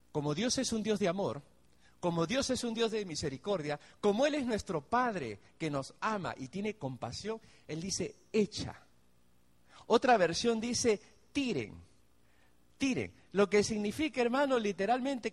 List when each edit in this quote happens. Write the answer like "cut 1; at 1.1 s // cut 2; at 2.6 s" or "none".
none